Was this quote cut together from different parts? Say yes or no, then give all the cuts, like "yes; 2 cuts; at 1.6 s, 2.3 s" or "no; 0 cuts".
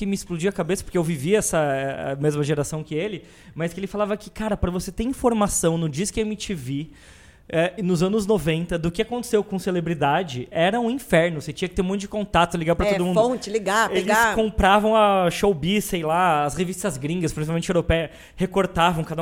no; 0 cuts